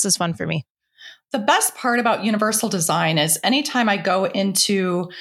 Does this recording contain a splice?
no; 0 cuts

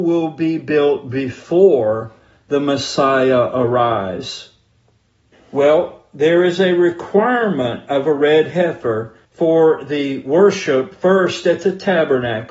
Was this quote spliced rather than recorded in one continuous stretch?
yes; 2 cuts; at 5.3 s, 9.2 s

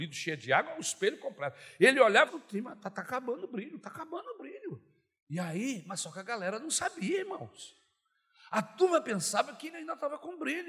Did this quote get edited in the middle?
yes; 1 cut; at 2.3 s

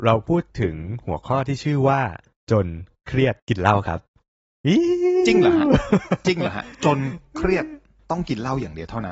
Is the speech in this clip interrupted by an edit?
yes; 1 cut; at 3.4 s

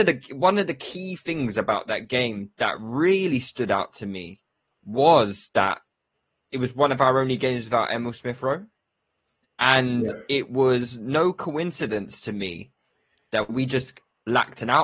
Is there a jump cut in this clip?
no; 0 cuts

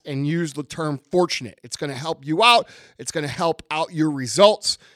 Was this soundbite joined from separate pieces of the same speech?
no; 0 cuts

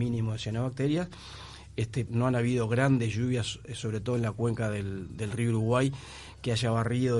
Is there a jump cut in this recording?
yes; 1 cut; at 2.1 s

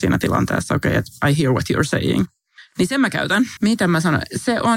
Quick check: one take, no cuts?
no; 1 cut; at 3.6 s

